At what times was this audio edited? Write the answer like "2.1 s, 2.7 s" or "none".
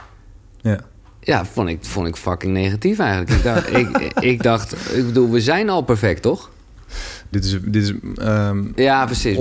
7.3 s